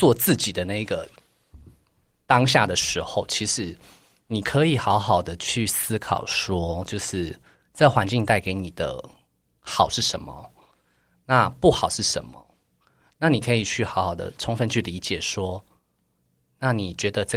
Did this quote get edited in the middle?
no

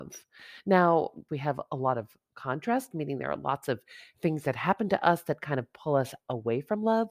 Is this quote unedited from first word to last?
no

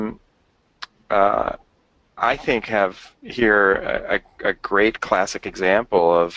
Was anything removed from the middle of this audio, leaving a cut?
no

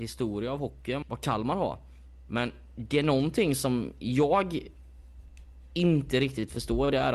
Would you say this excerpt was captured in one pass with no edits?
no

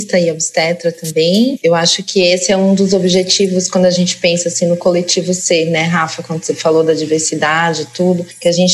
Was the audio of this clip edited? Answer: no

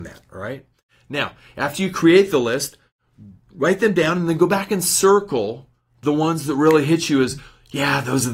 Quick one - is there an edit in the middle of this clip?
no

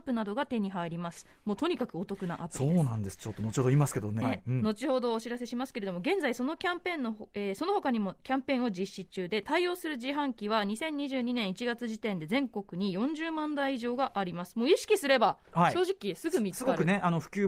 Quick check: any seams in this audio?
yes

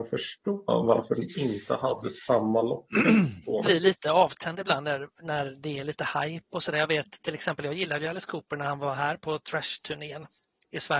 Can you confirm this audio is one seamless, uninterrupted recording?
no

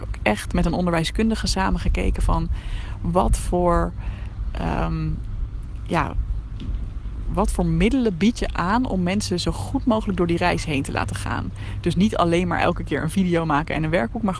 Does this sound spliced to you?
no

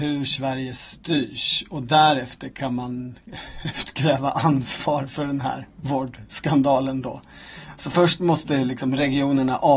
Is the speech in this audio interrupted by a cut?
no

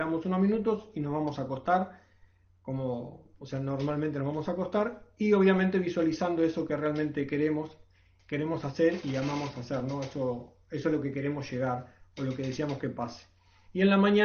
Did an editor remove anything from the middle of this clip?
yes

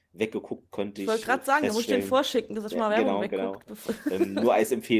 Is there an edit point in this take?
no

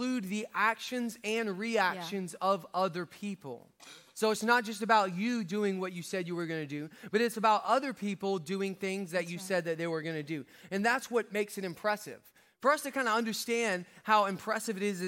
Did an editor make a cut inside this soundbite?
no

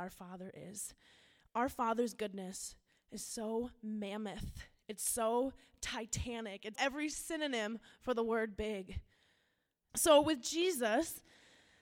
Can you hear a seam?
yes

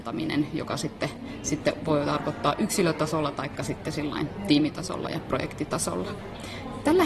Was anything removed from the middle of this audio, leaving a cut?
no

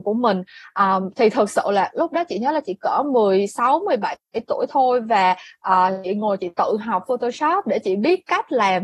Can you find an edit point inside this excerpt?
no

